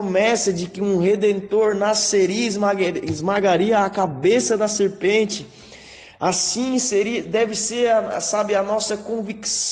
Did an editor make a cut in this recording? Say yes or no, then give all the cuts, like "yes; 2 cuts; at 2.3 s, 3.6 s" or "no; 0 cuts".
no; 0 cuts